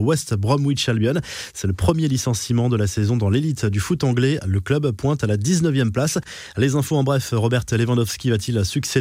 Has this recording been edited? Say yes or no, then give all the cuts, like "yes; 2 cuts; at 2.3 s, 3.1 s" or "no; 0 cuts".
no; 0 cuts